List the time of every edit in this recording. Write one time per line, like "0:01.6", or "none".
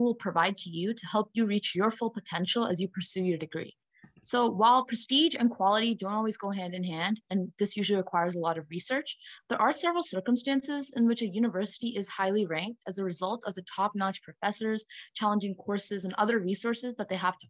0:15.1